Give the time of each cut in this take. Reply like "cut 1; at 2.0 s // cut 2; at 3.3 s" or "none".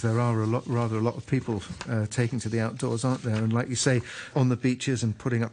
cut 1; at 4.3 s

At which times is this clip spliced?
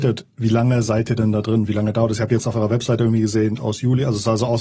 cut 1; at 3.6 s

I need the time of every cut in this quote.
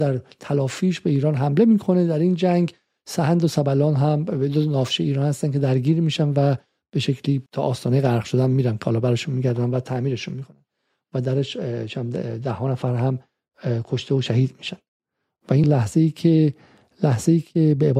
cut 1; at 7.5 s // cut 2; at 15.6 s

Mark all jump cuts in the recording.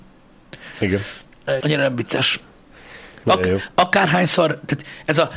cut 1; at 1.6 s // cut 2; at 3.2 s

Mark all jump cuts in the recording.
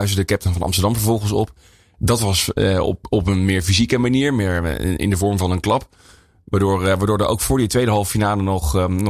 none

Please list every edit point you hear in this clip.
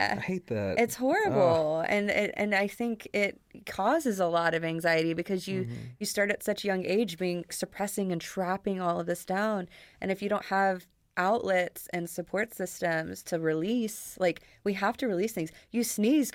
cut 1; at 7.5 s

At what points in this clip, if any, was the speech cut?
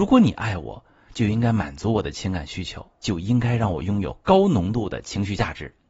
cut 1; at 3.0 s

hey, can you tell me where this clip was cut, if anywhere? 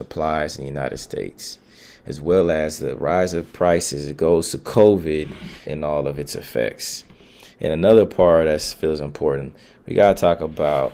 cut 1; at 5.7 s

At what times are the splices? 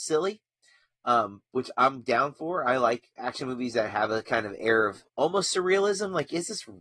cut 1; at 5.1 s

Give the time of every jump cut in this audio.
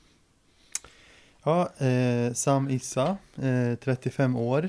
none

